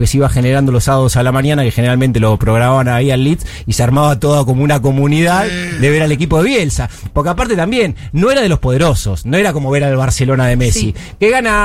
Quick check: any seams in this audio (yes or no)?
no